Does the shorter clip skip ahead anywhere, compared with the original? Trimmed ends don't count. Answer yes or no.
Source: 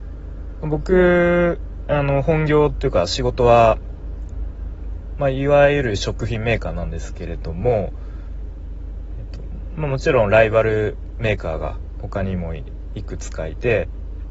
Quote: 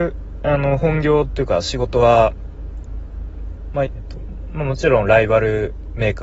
yes